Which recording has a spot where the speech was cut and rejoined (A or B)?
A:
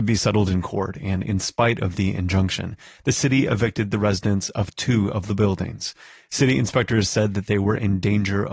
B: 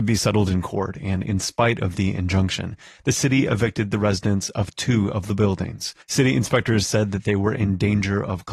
B